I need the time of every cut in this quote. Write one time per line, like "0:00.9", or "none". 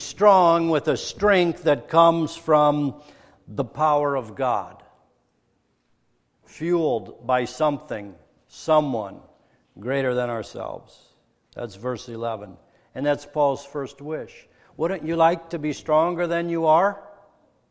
0:06.3